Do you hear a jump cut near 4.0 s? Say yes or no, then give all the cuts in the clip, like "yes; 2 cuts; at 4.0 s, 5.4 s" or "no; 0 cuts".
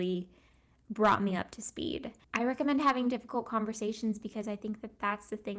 no; 1 cut; at 2.2 s